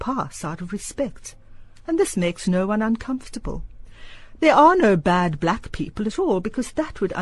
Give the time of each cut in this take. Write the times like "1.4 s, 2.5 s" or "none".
4.4 s